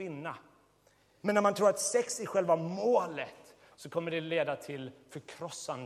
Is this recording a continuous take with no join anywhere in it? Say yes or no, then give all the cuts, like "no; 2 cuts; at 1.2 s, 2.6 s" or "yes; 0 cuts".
no; 1 cut; at 1.2 s